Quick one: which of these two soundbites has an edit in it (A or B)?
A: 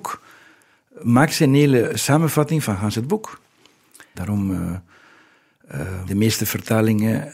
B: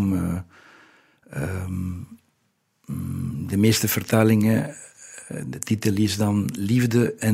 A